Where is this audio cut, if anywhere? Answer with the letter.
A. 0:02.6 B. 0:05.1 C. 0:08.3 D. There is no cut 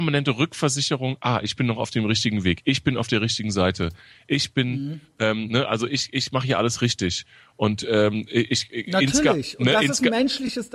D